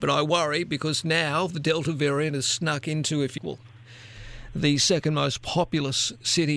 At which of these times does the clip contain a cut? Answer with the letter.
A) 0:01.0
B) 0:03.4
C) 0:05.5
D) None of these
B